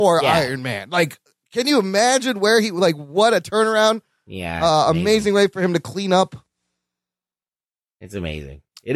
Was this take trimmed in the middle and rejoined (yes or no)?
no